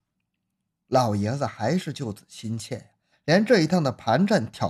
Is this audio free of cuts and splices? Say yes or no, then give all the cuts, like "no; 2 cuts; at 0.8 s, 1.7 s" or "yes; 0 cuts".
no; 1 cut; at 3.1 s